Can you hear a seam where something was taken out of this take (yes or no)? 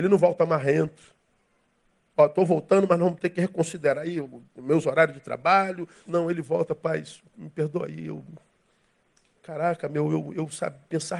yes